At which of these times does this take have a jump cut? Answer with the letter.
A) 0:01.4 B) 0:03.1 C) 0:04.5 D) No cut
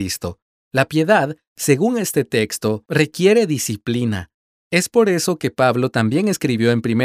C